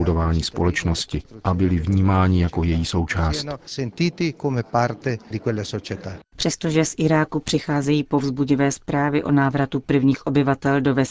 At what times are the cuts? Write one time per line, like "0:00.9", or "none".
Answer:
none